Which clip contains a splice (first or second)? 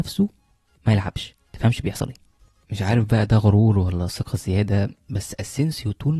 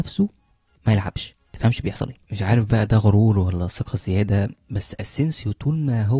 second